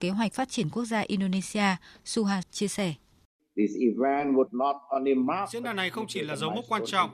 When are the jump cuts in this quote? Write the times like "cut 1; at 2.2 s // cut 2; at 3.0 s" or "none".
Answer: cut 1; at 2.4 s